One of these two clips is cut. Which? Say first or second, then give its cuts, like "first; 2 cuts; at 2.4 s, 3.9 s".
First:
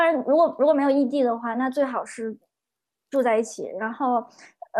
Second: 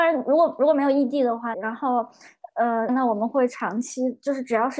second; 2 cuts; at 1.5 s, 2.9 s